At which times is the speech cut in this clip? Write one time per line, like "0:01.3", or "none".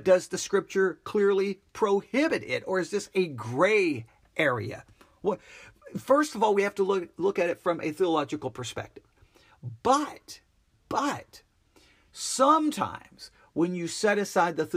none